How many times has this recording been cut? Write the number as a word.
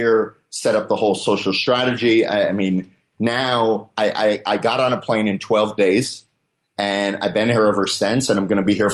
zero